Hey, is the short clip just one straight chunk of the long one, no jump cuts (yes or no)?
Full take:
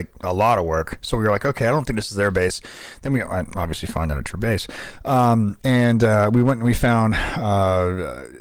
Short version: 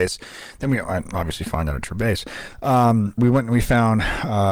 no